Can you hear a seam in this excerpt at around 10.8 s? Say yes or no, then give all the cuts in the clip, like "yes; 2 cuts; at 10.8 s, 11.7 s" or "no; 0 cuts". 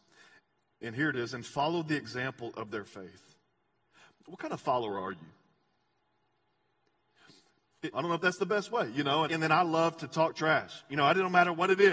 no; 2 cuts; at 7.9 s, 9.3 s